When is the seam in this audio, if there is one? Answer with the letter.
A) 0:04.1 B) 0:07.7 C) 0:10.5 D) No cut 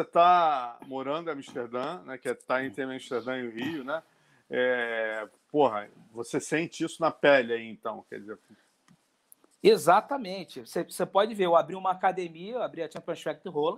D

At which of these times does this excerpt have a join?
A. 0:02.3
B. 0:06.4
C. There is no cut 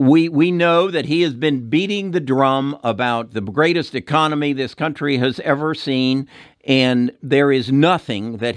C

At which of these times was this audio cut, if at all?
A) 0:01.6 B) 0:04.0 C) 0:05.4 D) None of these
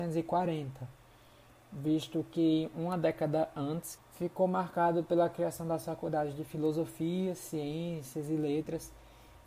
B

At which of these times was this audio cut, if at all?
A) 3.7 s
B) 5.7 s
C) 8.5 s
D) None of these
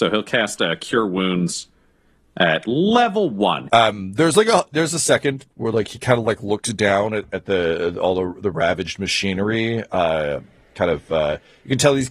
A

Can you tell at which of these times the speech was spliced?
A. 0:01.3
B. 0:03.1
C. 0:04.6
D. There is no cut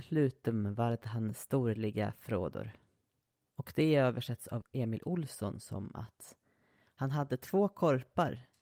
C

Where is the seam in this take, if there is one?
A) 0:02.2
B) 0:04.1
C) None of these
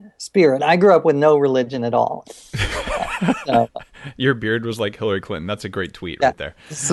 A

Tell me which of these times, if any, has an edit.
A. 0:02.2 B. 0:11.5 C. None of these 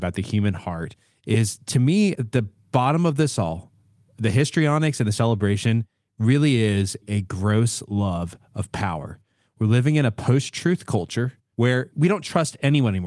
B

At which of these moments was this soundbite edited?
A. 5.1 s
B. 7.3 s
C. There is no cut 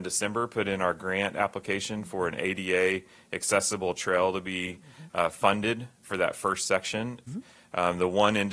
B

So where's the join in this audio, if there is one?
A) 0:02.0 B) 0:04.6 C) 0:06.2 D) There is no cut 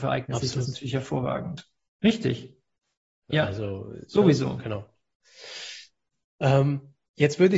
A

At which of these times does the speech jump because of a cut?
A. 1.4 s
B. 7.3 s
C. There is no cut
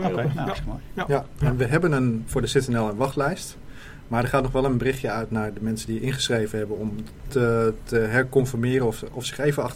B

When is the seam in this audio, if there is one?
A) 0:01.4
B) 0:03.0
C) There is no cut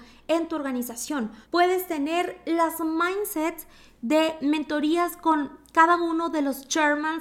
A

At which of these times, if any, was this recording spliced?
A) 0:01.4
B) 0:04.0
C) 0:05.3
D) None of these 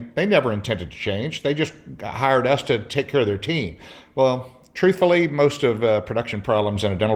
D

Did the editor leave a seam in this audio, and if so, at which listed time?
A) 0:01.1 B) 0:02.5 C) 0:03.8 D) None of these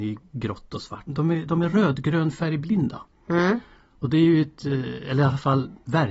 A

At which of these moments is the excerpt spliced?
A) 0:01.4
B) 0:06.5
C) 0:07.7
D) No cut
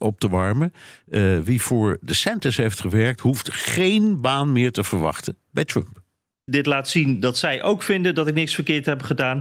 B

